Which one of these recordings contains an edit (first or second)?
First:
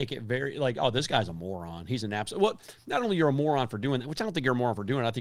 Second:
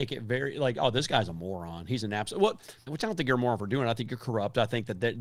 second